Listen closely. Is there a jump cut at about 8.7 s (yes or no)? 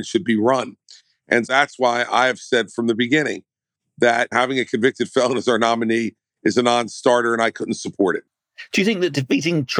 no